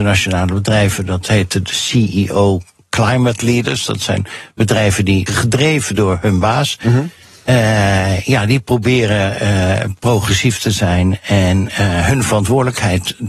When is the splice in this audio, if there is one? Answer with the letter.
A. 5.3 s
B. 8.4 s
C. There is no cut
A